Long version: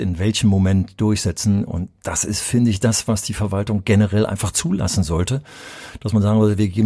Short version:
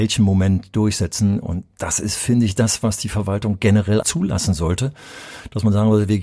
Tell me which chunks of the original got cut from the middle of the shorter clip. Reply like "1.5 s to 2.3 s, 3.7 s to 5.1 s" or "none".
4.3 s to 4.5 s